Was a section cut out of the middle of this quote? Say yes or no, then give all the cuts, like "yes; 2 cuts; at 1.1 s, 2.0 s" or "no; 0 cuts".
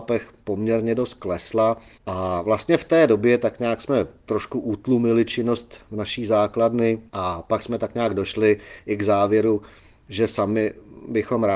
yes; 2 cuts; at 2.0 s, 7.1 s